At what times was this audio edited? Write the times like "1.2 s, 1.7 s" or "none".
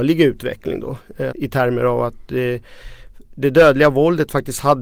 1.3 s